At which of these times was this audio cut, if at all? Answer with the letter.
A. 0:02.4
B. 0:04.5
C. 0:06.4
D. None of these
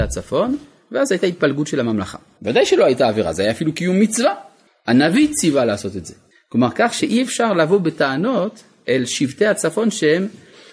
A